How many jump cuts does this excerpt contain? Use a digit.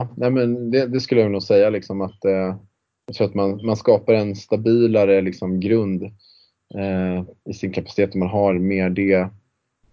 0